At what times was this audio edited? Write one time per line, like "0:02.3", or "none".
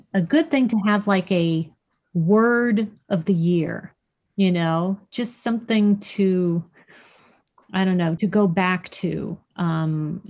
0:08.2

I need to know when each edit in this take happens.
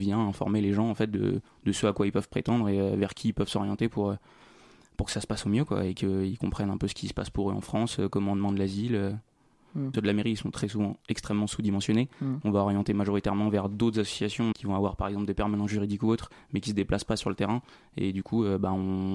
0:09.9
0:14.5

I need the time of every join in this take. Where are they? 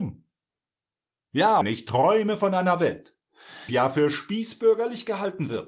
0:01.6
0:03.7

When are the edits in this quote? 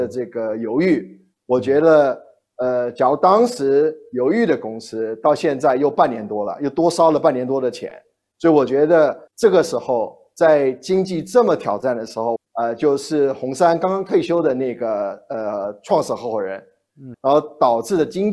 0:09.3
0:12.4
0:17.1

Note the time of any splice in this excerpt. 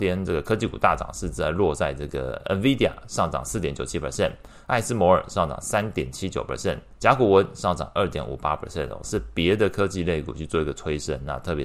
0:07.0
0:09.0

